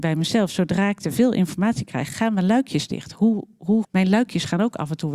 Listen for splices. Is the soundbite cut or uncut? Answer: cut